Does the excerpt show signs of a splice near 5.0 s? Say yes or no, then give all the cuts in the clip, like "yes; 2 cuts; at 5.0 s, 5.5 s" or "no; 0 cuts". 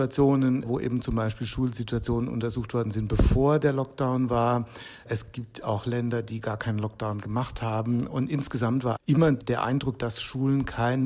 no; 2 cuts; at 9.0 s, 10.0 s